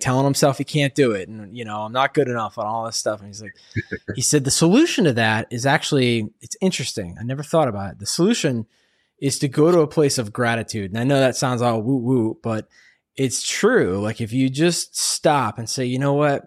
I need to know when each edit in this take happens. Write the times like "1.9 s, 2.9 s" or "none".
none

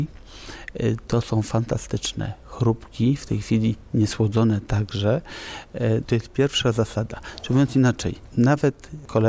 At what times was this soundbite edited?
6.0 s

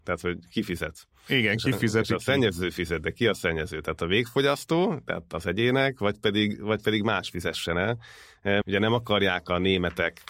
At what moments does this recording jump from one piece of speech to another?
8.6 s

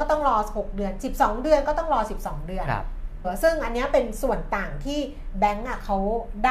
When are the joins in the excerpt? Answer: 3.2 s

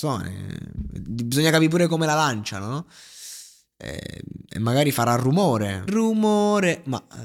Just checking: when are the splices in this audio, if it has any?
5.9 s

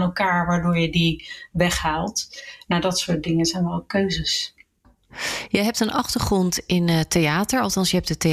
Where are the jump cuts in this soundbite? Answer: none

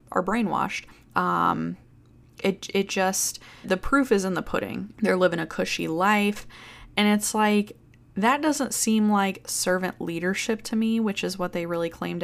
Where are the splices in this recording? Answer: 1.1 s, 3.6 s, 4.9 s

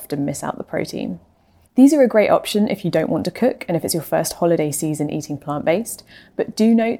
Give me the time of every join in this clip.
1.6 s

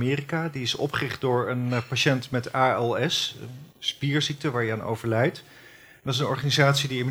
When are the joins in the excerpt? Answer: none

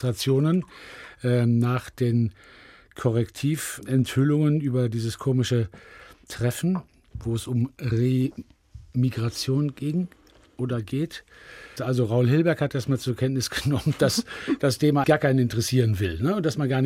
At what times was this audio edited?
11.8 s, 15.0 s

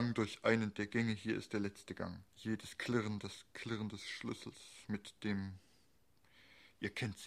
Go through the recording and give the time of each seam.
2.3 s

